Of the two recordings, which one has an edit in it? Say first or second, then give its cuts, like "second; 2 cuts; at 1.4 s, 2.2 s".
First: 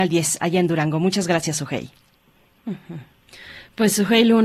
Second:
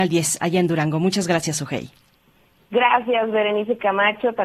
first; 1 cut; at 2.6 s